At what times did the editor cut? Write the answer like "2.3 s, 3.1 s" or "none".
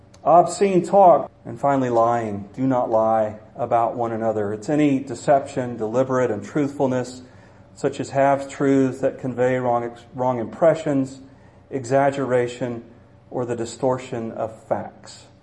1.3 s